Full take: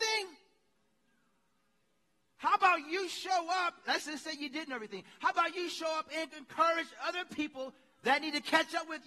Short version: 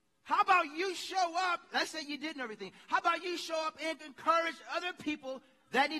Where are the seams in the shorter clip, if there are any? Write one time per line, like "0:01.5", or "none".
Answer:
0:01.9